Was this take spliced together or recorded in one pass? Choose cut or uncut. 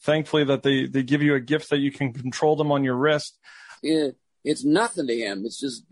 cut